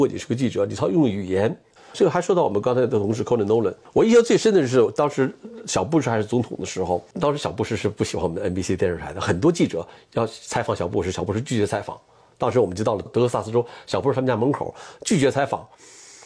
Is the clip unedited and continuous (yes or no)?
no